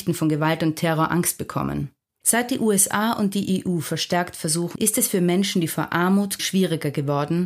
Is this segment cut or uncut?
cut